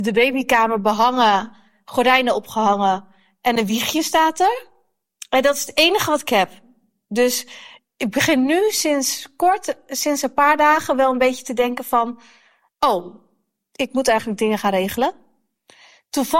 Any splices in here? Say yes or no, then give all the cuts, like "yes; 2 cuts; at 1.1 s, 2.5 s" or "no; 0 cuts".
no; 0 cuts